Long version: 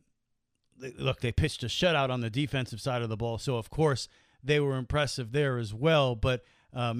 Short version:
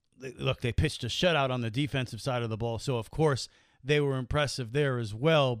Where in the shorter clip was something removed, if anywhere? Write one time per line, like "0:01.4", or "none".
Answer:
none